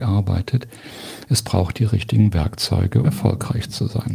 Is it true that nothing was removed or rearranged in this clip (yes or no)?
no